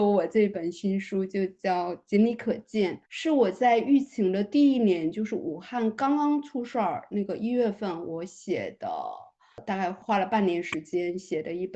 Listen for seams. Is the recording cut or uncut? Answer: cut